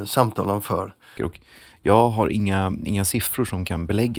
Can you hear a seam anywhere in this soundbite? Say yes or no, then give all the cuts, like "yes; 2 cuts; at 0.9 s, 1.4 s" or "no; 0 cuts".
yes; 1 cut; at 1.2 s